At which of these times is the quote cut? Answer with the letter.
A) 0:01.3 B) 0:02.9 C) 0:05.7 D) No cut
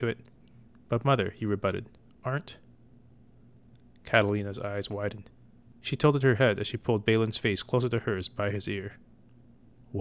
D